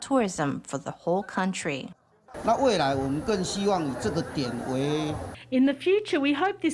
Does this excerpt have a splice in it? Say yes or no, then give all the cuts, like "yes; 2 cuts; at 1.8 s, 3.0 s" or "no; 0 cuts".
yes; 1 cut; at 2.3 s